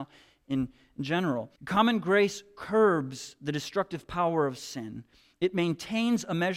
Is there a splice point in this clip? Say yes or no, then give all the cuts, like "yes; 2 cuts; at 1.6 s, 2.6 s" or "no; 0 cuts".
yes; 1 cut; at 1.6 s